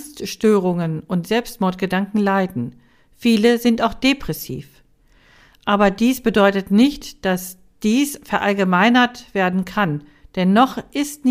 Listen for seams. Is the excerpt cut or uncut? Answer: uncut